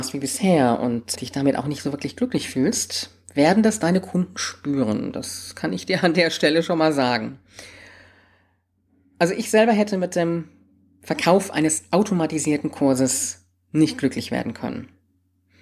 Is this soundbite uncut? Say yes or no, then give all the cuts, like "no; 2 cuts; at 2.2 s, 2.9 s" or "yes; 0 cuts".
no; 1 cut; at 1.2 s